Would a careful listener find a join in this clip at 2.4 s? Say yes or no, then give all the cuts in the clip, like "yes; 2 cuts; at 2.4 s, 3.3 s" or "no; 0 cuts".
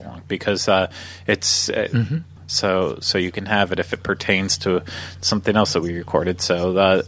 yes; 1 cut; at 2.4 s